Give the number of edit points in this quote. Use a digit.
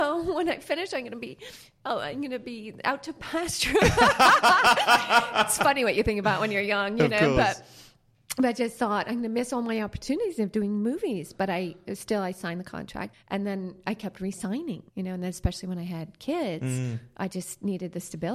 2